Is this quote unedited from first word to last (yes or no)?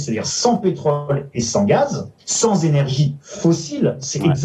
no